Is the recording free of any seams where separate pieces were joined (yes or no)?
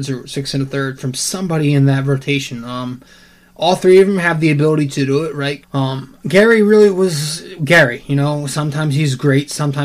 no